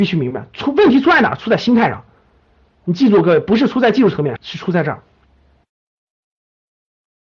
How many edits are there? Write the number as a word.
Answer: one